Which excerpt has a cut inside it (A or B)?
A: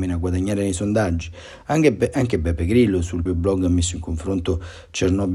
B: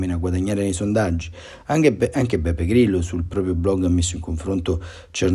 A